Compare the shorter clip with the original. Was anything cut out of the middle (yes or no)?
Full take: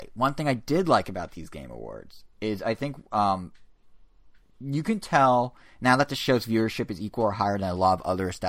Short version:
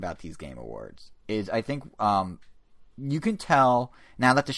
yes